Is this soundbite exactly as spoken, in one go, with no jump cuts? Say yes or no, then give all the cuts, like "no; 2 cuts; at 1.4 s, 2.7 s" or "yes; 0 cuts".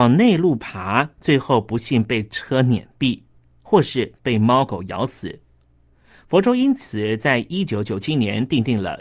yes; 0 cuts